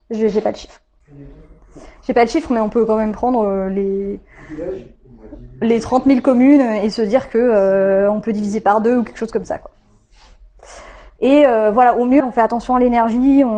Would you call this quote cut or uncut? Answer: cut